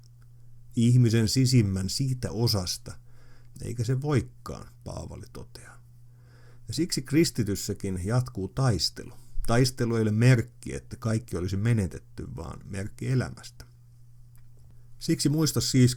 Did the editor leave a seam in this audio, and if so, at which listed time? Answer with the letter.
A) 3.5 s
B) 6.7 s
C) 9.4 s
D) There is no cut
A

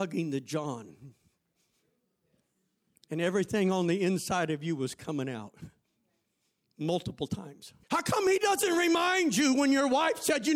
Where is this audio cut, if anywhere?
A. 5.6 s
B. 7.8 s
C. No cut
B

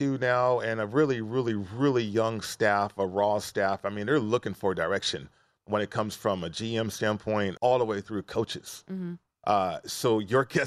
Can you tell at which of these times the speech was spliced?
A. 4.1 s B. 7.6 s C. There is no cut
B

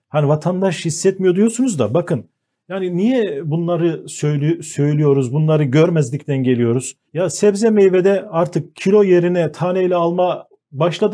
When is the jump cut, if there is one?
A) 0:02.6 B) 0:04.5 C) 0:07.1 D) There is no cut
C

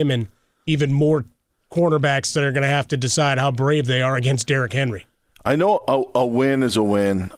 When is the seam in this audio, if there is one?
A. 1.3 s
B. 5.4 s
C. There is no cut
C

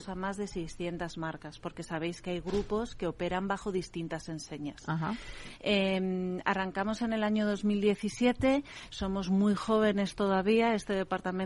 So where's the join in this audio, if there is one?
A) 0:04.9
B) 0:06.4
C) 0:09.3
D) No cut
D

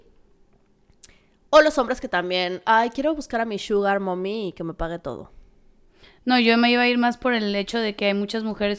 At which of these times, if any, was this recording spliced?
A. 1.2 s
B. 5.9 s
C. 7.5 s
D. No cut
D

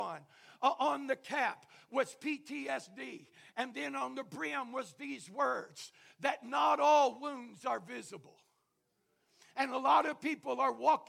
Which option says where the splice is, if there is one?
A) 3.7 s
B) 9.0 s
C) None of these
C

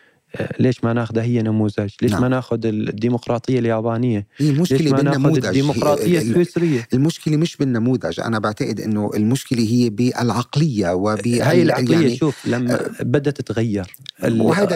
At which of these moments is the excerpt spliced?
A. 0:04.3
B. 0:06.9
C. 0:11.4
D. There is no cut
C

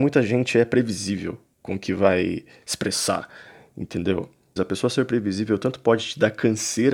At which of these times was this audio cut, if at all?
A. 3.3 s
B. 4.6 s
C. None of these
B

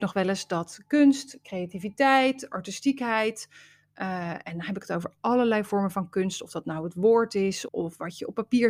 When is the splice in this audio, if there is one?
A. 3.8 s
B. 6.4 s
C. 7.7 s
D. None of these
C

